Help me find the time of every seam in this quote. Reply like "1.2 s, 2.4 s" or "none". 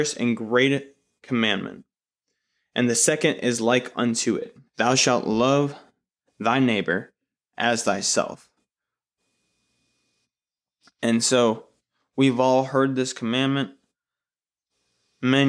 4.7 s